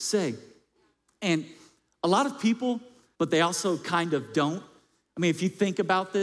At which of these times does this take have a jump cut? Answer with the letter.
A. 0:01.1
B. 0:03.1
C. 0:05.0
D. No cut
B